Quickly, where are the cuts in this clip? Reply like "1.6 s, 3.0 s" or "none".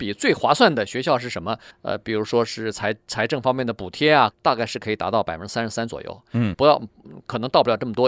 1.7 s, 4.3 s, 6.5 s